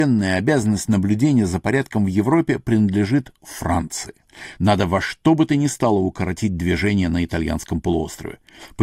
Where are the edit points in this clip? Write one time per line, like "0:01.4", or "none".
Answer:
0:04.5